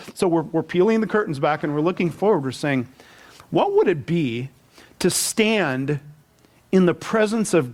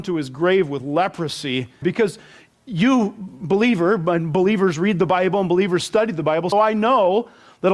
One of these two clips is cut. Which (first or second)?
second